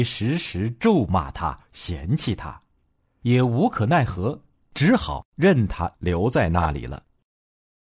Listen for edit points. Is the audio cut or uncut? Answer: uncut